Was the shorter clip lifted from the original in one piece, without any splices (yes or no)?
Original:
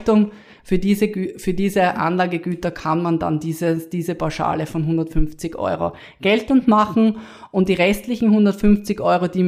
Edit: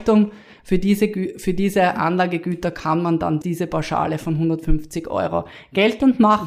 no